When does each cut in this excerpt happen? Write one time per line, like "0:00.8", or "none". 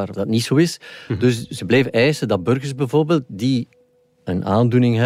none